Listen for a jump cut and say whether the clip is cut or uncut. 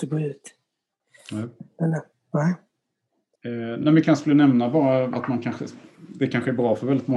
uncut